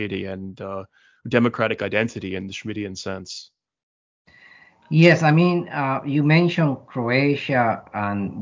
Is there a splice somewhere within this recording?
no; 0 cuts

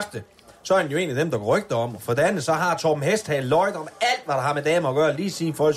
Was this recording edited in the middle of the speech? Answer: no; 0 cuts

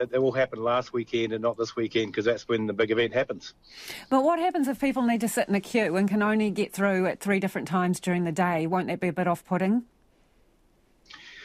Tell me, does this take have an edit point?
no; 0 cuts

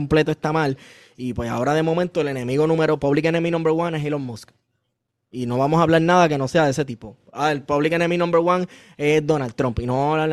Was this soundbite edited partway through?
no; 0 cuts

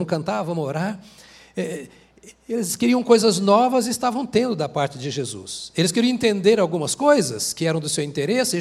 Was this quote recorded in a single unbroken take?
yes; 0 cuts

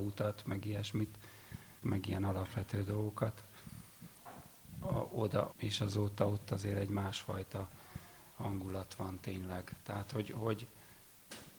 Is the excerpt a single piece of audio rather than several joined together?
no; 2 cuts; at 1.8 s, 5.5 s

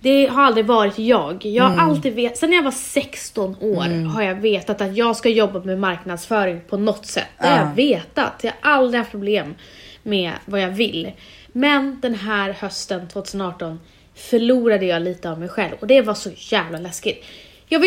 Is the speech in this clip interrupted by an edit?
no; 0 cuts

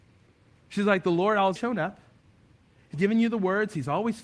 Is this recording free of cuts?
no; 2 cuts; at 1.6 s, 2.9 s

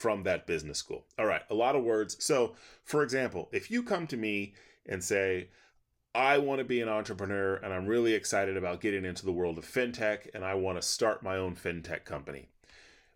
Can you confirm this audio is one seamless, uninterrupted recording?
no; 1 cut; at 2.2 s

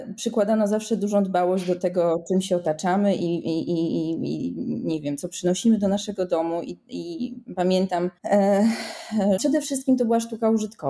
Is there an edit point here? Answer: yes; 2 cuts; at 8.2 s, 9.4 s

